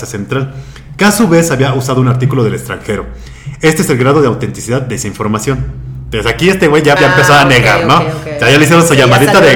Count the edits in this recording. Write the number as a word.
one